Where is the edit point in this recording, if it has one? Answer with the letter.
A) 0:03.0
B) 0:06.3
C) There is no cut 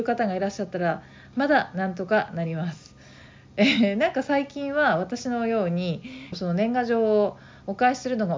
B